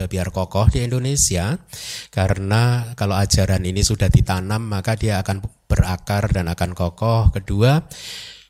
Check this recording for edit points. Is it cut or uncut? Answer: uncut